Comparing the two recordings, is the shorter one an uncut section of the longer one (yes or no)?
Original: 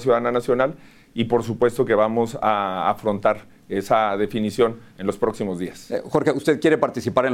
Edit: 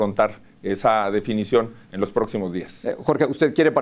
yes